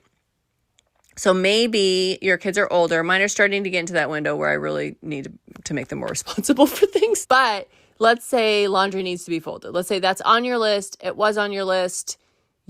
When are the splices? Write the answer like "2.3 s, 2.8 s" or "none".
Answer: 7.2 s